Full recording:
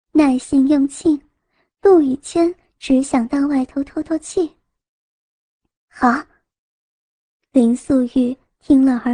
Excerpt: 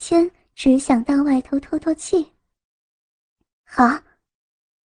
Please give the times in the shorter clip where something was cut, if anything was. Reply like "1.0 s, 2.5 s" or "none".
none